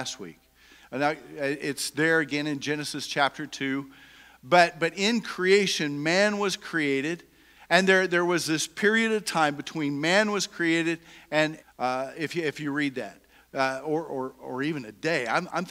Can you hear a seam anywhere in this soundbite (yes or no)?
yes